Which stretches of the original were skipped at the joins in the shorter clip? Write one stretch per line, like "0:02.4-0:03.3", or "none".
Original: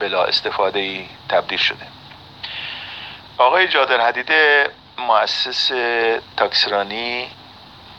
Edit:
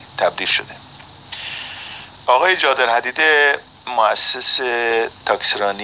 none